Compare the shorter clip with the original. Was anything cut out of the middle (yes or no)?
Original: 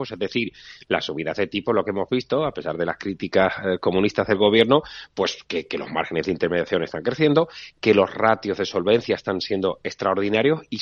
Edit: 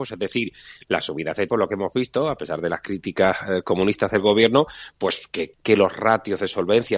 yes